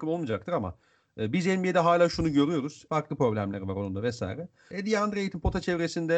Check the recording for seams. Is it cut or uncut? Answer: cut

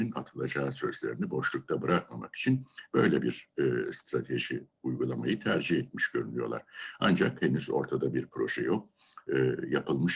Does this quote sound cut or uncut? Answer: uncut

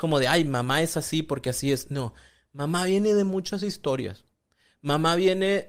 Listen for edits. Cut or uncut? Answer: uncut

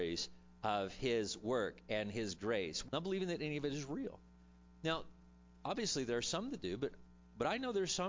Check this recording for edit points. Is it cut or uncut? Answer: cut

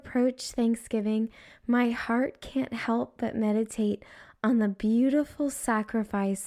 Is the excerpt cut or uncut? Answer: uncut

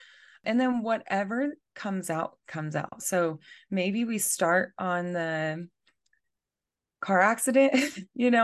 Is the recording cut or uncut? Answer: uncut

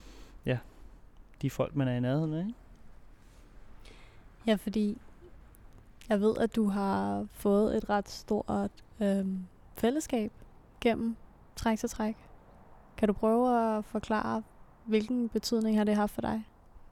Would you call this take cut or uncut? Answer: uncut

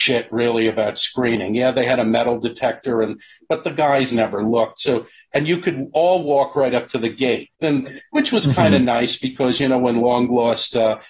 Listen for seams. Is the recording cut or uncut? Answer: cut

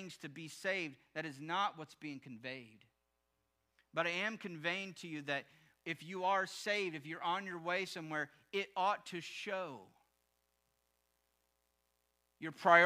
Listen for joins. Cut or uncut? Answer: uncut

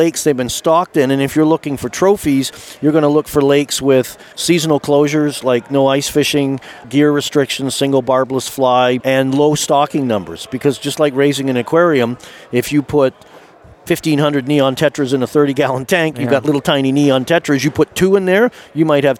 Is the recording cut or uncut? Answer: cut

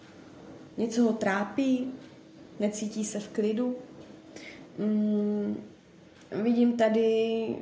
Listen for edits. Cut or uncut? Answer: cut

